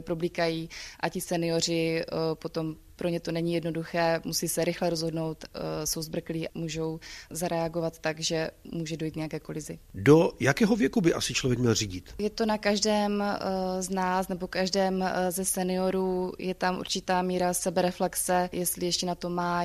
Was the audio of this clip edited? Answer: no; 0 cuts

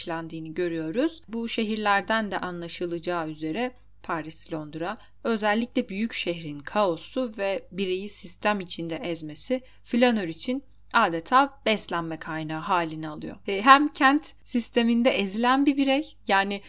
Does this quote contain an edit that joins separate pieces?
yes; 1 cut; at 13.4 s

